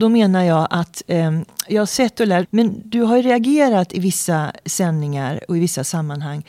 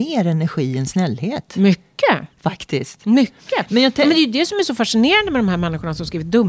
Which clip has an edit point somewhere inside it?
first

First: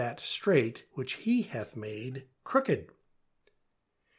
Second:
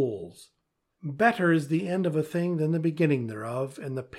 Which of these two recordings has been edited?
second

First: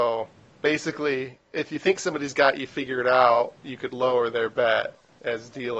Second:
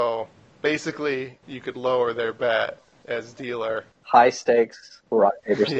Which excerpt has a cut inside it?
second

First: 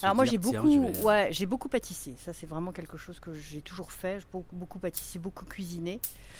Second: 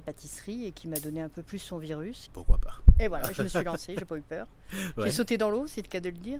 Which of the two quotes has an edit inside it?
second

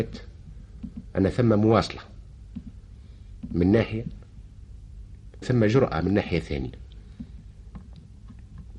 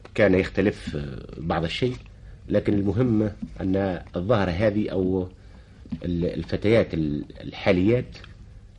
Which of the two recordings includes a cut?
first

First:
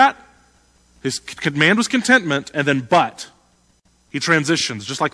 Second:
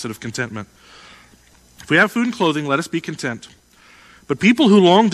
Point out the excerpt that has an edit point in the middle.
second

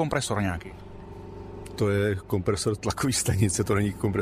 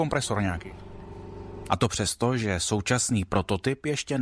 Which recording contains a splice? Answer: second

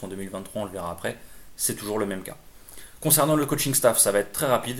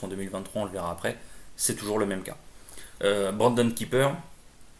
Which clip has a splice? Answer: second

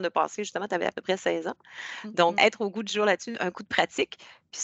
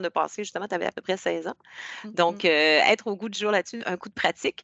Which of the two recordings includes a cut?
first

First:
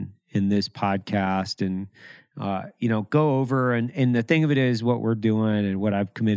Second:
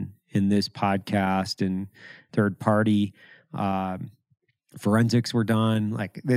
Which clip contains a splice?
second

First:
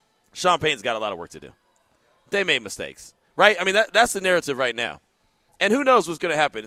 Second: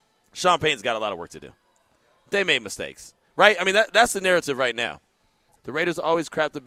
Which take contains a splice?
second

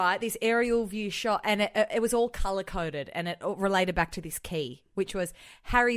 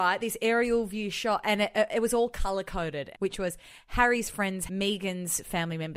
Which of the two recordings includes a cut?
second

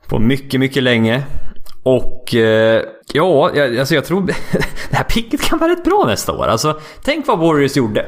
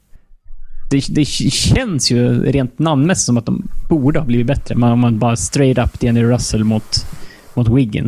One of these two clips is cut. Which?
first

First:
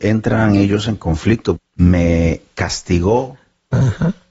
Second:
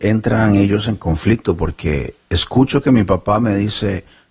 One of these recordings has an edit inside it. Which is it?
first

